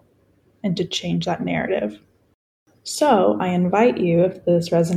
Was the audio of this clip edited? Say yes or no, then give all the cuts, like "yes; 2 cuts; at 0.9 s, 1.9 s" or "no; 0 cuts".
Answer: no; 0 cuts